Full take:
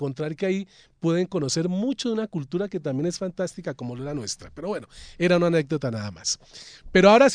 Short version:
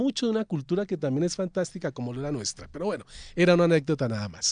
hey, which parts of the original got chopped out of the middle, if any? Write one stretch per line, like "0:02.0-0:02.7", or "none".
none